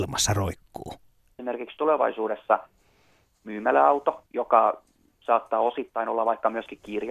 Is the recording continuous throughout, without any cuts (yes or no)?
no